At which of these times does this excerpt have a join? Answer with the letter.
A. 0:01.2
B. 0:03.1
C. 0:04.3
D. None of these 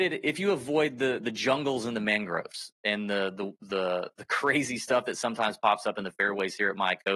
A